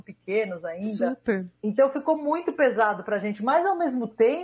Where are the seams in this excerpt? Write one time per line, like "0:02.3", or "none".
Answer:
0:01.6

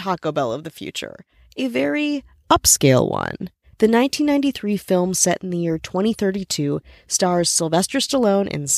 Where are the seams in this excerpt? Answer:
0:03.6

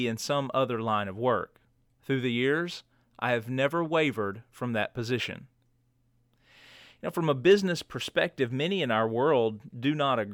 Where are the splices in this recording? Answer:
none

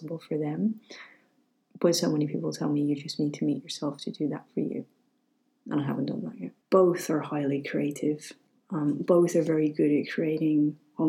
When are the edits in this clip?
0:06.6

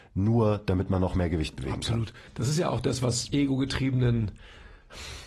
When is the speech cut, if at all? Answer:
0:02.3
0:03.3

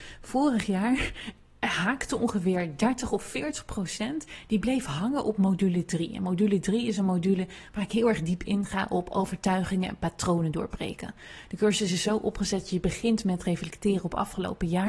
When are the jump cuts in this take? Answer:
none

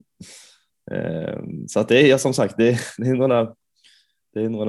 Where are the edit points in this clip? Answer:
none

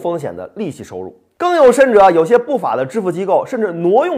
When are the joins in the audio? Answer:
0:01.4

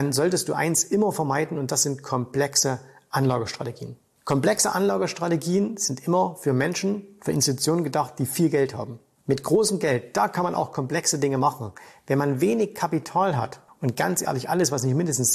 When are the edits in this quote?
none

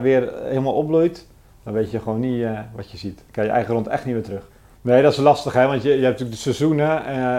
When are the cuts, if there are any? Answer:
0:04.7

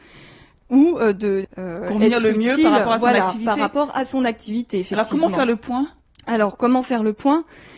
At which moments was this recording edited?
0:01.4

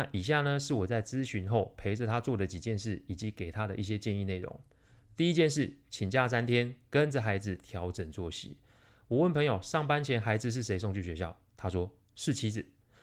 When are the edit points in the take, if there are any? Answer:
none

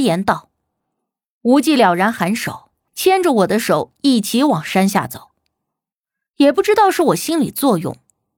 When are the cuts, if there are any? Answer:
0:02.9

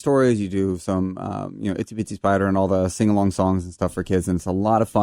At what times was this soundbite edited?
none

